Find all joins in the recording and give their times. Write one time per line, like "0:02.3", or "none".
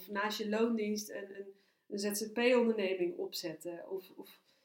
none